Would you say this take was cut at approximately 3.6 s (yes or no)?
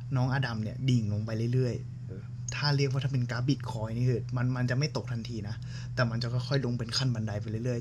no